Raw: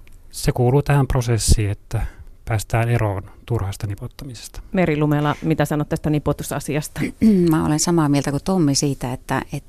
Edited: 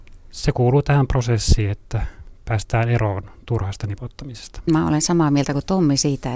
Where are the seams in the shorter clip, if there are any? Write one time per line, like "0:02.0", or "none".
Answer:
0:04.7